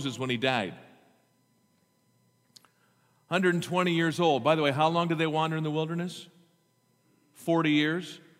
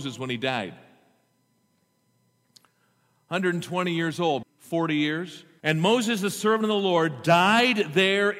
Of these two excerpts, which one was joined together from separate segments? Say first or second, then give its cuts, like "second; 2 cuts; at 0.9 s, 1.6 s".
second; 2 cuts; at 4.4 s, 5.6 s